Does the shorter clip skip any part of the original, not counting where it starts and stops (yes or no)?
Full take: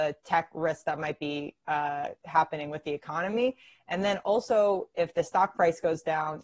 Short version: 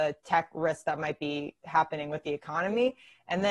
yes